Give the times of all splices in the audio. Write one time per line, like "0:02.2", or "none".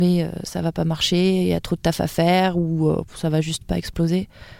0:03.1